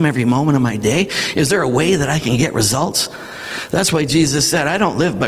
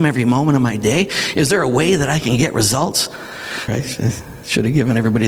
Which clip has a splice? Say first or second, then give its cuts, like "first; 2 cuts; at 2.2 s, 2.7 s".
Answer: second; 1 cut; at 3.7 s